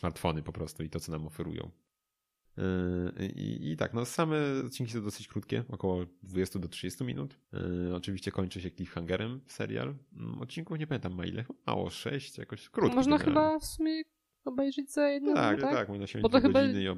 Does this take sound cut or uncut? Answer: cut